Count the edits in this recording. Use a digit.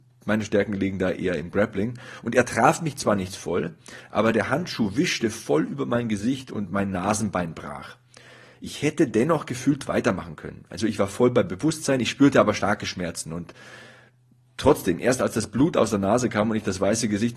0